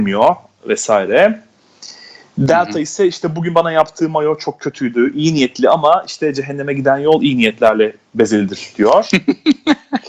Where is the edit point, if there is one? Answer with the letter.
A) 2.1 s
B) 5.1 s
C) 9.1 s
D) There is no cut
D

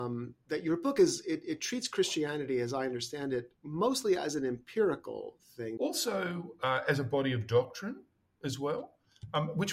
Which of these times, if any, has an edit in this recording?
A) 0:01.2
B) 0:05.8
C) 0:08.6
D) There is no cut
B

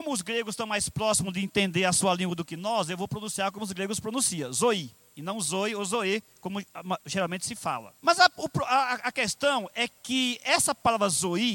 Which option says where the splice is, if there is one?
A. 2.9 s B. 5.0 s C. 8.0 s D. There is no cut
C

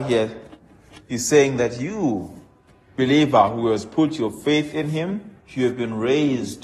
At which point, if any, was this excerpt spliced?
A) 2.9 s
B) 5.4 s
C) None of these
B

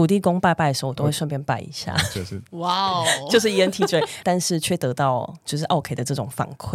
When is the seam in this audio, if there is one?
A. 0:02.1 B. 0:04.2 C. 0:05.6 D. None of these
B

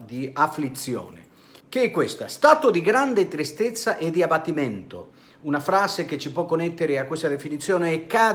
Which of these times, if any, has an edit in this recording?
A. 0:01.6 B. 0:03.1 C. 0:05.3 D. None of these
A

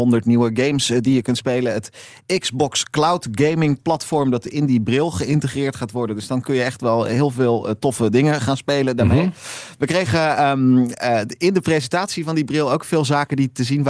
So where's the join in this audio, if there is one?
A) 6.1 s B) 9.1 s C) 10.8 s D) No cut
D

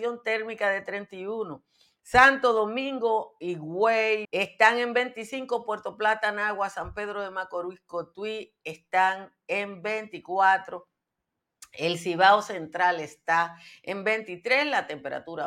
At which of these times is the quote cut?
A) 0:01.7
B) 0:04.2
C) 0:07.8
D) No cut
B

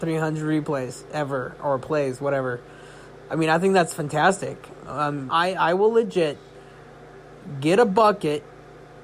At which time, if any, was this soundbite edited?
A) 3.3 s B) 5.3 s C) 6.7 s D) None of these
B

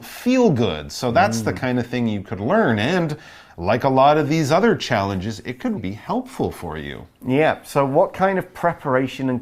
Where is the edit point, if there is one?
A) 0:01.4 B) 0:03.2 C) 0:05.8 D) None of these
C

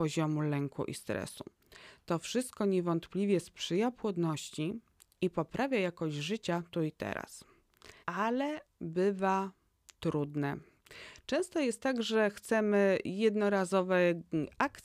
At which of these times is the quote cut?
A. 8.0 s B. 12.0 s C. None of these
A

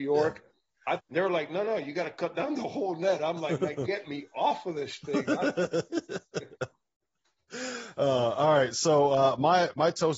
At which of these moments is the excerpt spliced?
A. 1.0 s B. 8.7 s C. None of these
A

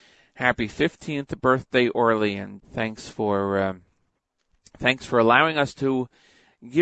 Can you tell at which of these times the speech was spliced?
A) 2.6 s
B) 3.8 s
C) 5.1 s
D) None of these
A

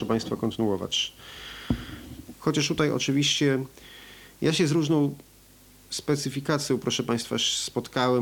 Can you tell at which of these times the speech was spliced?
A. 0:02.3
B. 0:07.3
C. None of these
A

